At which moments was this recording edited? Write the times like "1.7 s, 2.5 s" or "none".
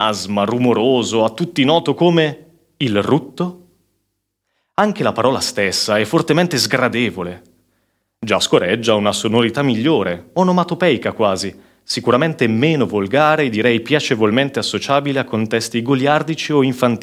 none